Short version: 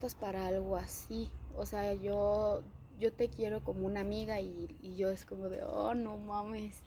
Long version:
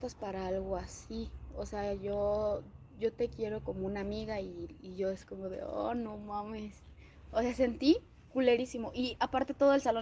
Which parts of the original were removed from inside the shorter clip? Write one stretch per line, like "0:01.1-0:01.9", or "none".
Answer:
none